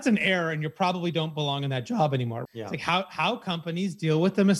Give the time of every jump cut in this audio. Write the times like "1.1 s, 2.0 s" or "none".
2.5 s

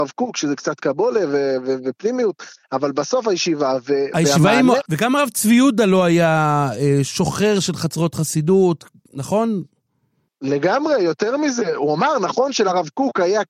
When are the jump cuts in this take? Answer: 4.8 s, 7.0 s

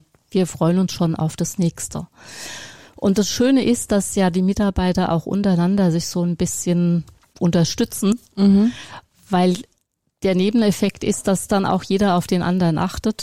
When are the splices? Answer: none

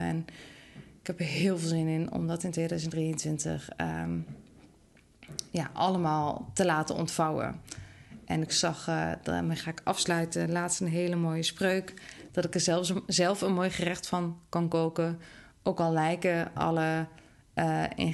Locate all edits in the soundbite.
12.3 s

